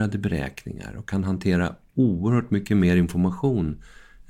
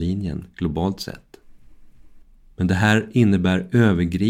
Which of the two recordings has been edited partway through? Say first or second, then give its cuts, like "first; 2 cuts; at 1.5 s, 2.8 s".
second; 1 cut; at 2.4 s